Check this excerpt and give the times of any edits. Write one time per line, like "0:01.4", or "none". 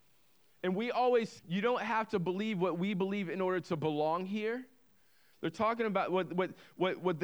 0:01.4
0:05.3